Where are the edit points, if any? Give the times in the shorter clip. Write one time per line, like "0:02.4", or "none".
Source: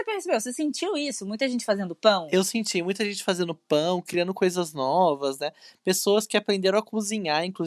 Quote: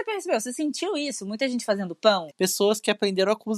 0:02.3